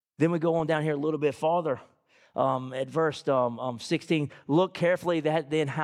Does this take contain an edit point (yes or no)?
no